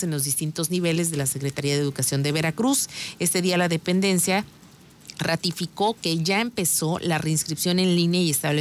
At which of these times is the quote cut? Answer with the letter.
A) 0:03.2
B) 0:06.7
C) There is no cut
C